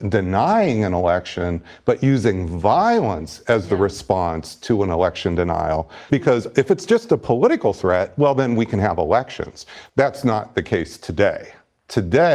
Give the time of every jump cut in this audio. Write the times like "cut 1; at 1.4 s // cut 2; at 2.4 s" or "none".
cut 1; at 6.1 s // cut 2; at 9.9 s

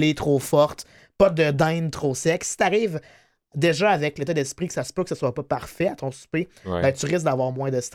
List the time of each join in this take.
none

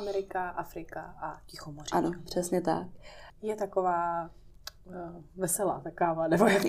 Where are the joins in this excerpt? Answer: cut 1; at 3.3 s

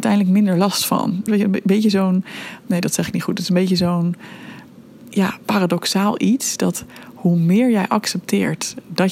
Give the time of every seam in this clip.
cut 1; at 1.3 s

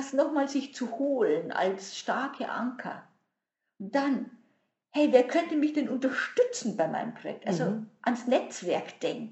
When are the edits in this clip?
none

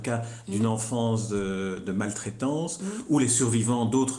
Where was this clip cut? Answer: none

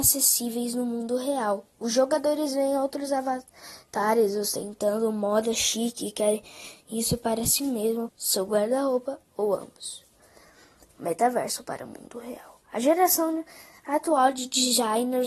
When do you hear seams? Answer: cut 1; at 8.1 s

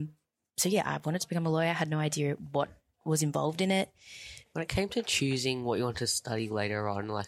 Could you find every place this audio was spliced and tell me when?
cut 1; at 4.4 s

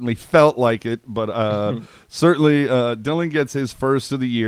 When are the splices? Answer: none

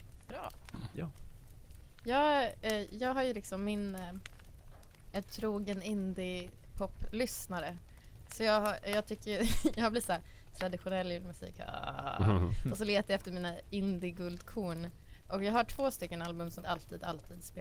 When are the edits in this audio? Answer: cut 1; at 16.6 s

